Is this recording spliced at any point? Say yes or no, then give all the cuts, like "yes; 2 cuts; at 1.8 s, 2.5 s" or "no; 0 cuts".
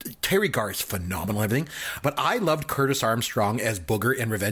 yes; 1 cut; at 2.0 s